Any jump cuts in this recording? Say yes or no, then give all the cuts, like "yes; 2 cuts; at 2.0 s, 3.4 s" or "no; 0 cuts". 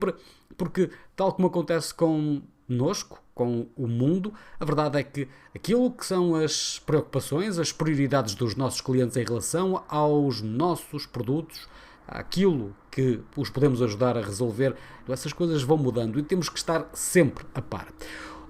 yes; 2 cuts; at 11.9 s, 15.1 s